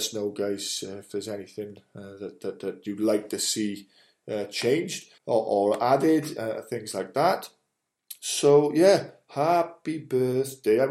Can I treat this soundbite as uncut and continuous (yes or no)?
no